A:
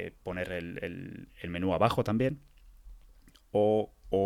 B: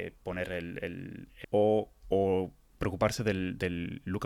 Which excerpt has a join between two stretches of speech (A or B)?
B